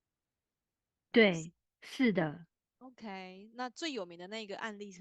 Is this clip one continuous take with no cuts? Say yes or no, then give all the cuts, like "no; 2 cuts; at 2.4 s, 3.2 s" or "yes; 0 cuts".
no; 1 cut; at 1.1 s